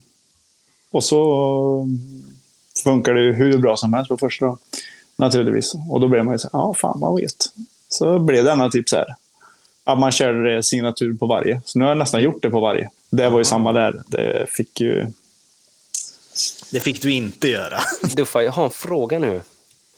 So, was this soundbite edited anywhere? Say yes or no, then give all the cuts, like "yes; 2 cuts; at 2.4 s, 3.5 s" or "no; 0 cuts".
yes; 2 cuts; at 13.0 s, 18.1 s